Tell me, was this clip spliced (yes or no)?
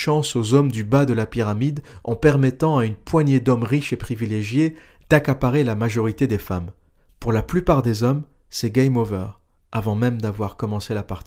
no